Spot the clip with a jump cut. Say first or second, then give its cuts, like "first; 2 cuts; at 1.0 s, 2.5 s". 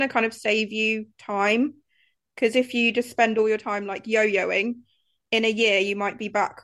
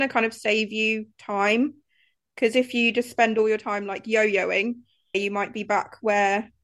second; 1 cut; at 5.1 s